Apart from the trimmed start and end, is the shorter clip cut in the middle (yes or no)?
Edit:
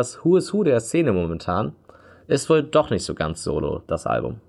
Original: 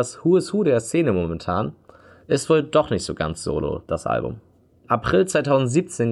no